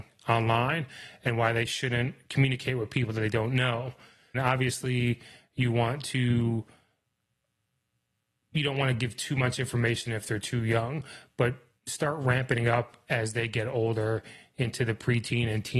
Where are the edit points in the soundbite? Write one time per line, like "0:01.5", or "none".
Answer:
0:04.3